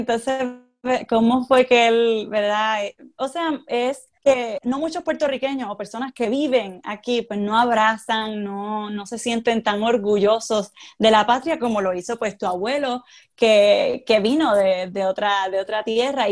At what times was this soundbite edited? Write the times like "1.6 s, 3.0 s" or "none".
4.2 s